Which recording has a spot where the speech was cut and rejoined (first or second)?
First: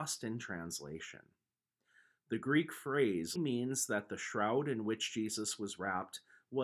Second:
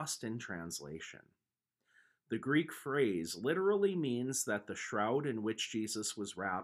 first